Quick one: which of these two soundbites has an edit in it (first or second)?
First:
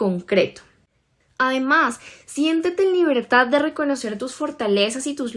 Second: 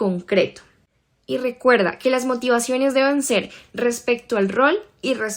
first